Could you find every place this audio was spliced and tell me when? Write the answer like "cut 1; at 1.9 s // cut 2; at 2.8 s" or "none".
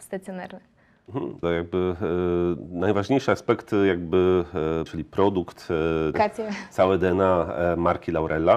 cut 1; at 1.4 s // cut 2; at 4.9 s // cut 3; at 6.1 s